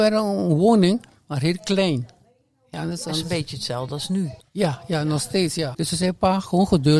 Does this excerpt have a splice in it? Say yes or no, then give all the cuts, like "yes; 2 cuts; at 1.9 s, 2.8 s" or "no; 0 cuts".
yes; 3 cuts; at 2.7 s, 4.4 s, 5.7 s